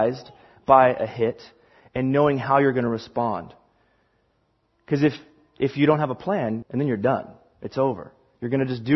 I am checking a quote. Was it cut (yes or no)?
yes